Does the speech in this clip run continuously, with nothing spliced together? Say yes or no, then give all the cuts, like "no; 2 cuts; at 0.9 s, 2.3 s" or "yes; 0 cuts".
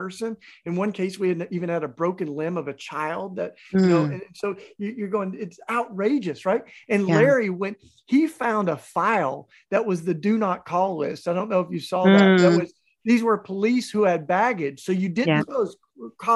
no; 1 cut; at 15.4 s